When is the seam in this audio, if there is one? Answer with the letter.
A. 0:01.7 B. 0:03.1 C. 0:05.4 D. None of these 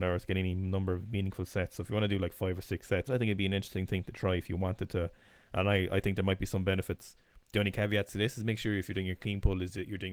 B